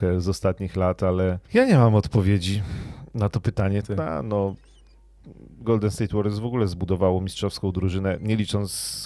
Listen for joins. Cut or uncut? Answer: cut